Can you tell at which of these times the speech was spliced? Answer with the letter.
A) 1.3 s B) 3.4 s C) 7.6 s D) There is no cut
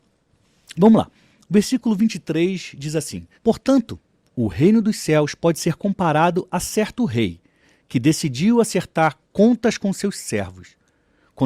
B